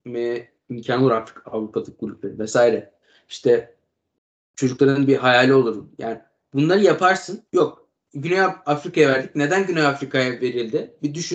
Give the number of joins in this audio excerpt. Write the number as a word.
one